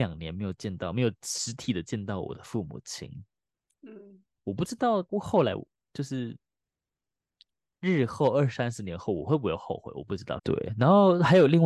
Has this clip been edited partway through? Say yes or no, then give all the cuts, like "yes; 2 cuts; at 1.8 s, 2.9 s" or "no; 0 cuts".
yes; 2 cuts; at 5.1 s, 10.4 s